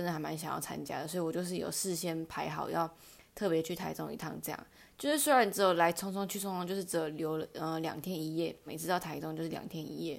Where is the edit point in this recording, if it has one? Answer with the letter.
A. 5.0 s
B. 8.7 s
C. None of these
B